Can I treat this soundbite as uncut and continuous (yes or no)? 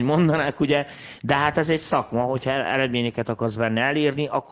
yes